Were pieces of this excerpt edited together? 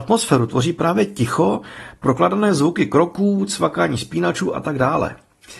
no; 0 cuts

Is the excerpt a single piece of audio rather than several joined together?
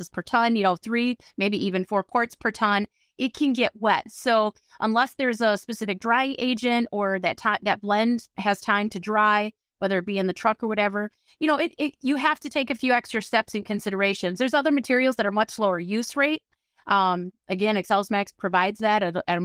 yes; 0 cuts

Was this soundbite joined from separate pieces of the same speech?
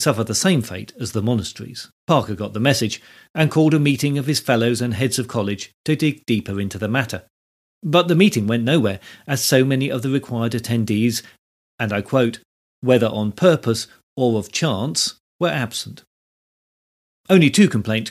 yes; 1 cut; at 2.0 s

